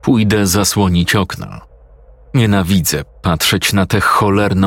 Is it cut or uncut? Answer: uncut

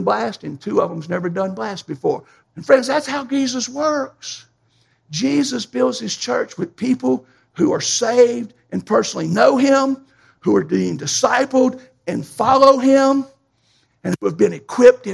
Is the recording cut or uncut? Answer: cut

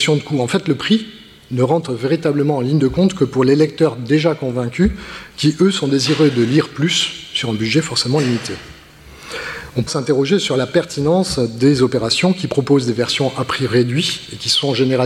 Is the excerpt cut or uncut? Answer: cut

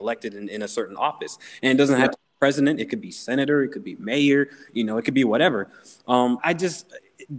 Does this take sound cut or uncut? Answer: cut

